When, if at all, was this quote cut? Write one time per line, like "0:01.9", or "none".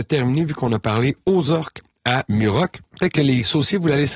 none